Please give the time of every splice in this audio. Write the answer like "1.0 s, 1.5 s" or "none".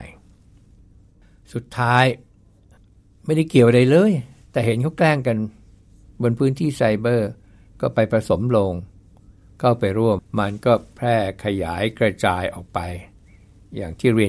10.2 s

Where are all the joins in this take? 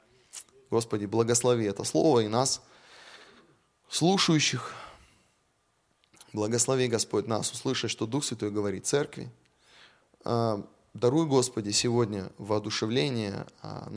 none

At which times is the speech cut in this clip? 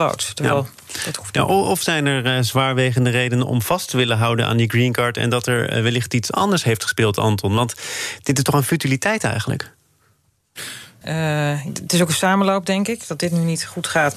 11.0 s

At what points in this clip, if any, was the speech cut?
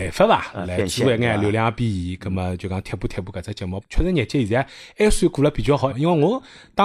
3.8 s, 5.9 s

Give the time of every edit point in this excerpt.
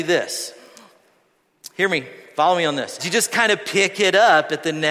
3.0 s

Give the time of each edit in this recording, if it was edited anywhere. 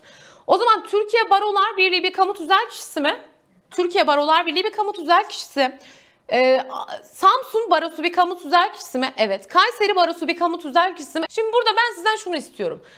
3.7 s, 11.3 s

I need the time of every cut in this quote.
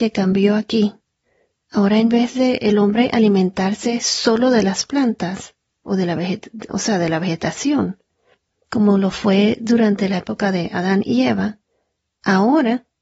none

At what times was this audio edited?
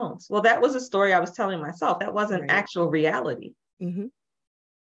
none

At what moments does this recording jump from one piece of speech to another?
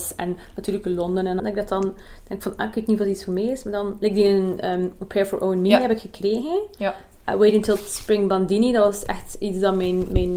1.4 s

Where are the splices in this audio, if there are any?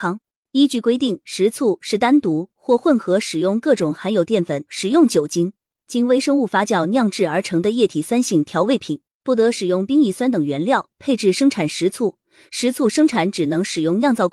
4.7 s, 9.2 s

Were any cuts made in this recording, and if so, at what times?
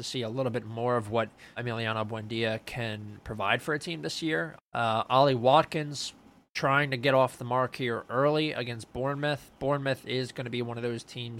1.6 s, 4.6 s

